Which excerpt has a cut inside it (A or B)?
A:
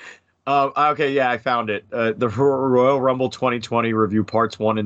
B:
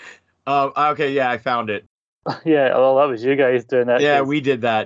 B